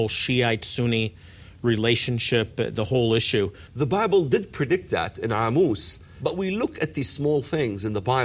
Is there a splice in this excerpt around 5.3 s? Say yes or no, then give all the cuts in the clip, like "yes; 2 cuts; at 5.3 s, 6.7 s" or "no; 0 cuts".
no; 1 cut; at 3.7 s